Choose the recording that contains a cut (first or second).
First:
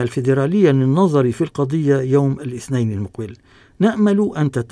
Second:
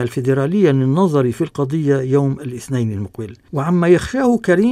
second